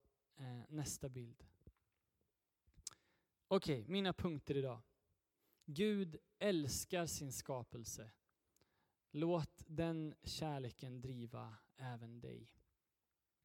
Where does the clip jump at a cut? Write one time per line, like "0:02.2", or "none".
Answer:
none